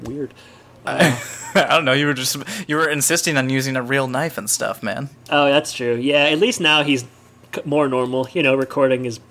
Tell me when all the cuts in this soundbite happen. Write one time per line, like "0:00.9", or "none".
none